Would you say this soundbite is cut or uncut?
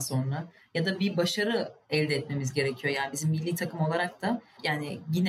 uncut